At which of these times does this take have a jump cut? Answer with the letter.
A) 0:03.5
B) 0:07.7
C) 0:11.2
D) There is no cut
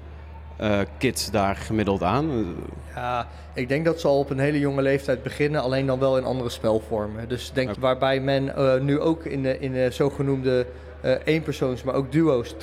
B